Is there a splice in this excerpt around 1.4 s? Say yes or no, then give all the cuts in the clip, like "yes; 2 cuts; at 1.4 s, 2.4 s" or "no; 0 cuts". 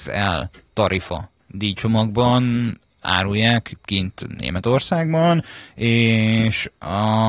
yes; 1 cut; at 1.4 s